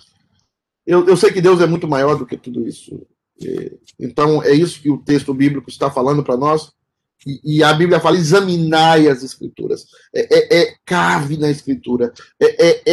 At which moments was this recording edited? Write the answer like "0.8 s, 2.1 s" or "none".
none